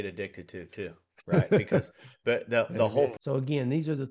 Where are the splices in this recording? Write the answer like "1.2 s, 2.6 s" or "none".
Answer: 3.2 s